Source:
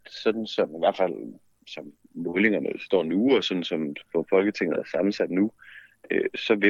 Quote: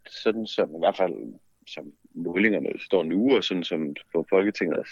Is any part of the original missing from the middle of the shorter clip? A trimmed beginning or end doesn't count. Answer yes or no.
no